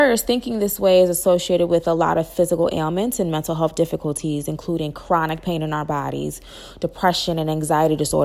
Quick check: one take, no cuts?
yes; 0 cuts

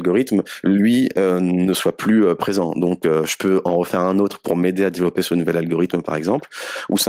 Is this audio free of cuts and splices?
yes; 0 cuts

